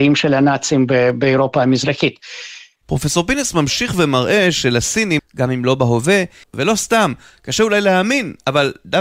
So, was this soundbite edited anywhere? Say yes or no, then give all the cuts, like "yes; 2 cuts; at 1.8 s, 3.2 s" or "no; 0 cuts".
yes; 3 cuts; at 2.8 s, 5.2 s, 6.4 s